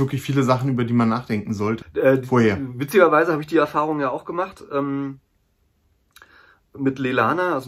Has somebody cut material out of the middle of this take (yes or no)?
yes